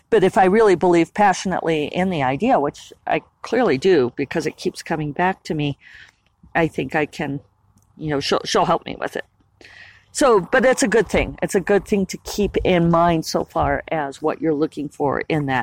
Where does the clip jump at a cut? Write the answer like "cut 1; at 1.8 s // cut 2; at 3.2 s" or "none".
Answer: cut 1; at 6.5 s